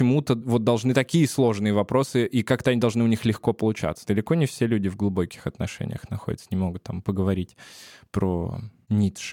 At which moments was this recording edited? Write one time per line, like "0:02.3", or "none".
0:04.0